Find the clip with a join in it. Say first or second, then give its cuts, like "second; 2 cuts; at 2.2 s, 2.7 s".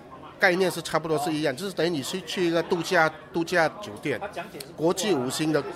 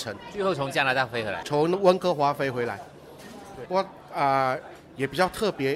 second; 2 cuts; at 1.4 s, 3.7 s